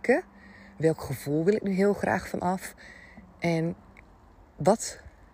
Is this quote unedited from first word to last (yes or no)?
yes